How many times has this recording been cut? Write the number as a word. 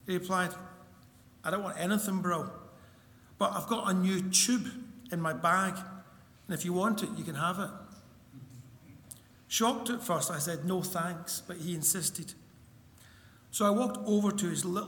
zero